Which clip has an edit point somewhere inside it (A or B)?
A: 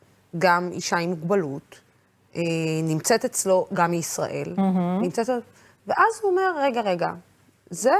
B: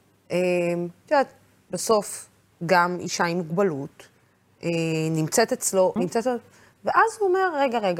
B